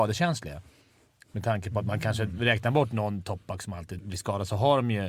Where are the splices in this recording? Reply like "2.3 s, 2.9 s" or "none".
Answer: 4.0 s